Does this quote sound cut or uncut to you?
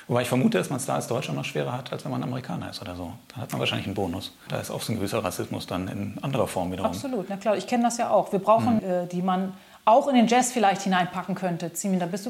cut